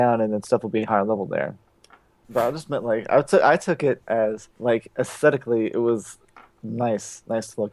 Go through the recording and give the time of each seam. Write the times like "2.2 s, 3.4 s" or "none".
2.2 s, 4.5 s